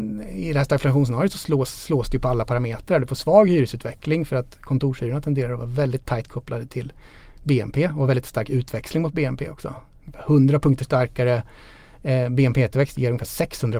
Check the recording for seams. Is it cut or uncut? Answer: uncut